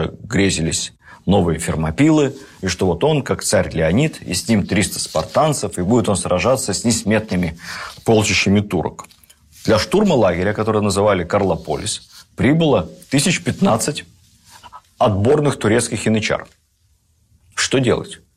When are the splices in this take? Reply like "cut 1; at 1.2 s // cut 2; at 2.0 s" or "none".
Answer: none